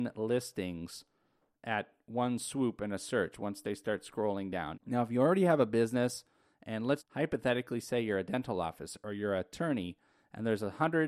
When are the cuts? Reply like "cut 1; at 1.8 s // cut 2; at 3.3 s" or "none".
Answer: cut 1; at 4.7 s // cut 2; at 7.0 s